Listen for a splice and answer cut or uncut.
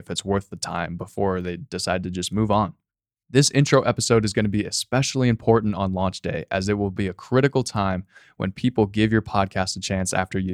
uncut